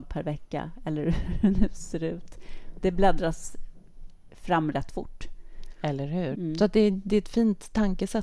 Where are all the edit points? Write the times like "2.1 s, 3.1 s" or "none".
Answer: 6.3 s

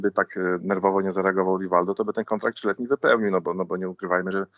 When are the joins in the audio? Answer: none

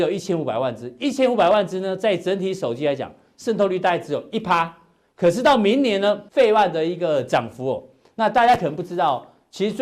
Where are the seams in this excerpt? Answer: 6.3 s

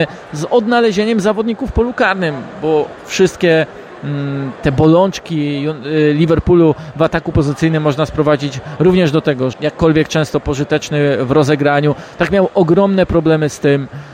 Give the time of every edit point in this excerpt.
9.5 s

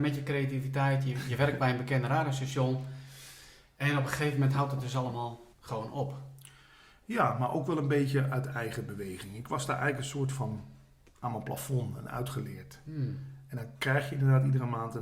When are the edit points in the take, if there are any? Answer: 5.5 s

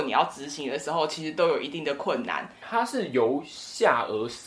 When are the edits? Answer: 2.6 s

